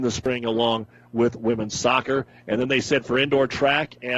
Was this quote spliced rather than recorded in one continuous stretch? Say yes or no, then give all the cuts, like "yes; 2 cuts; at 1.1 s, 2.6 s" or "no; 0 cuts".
no; 0 cuts